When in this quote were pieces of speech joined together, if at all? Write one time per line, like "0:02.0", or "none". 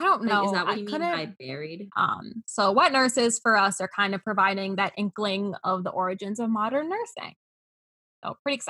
0:01.9